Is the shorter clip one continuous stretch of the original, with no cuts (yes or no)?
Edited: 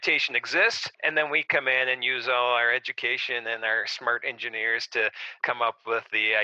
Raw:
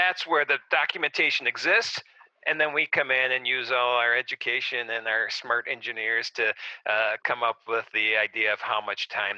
no